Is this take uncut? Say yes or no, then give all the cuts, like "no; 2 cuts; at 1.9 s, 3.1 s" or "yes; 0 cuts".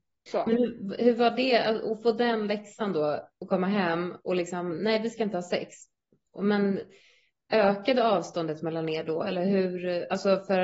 yes; 0 cuts